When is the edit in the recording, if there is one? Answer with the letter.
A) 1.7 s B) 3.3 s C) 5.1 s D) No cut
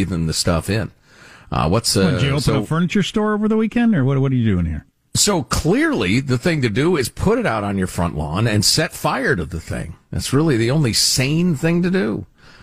C